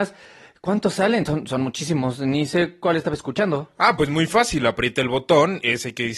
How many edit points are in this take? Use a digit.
0